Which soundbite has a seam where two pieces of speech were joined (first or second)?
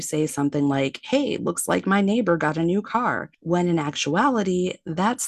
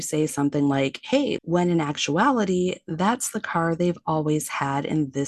second